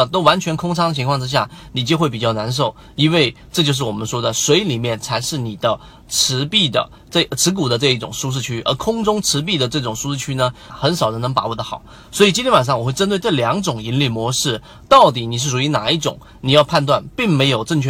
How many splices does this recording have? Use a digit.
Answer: 1